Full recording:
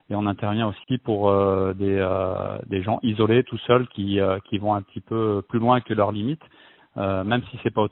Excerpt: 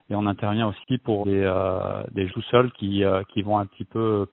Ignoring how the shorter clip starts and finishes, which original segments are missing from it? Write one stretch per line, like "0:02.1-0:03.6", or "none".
0:01.2-0:01.8
0:02.8-0:03.4